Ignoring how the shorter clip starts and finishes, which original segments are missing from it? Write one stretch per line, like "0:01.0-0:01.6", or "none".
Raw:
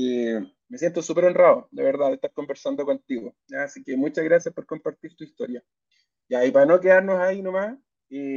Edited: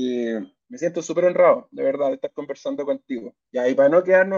0:03.4-0:06.2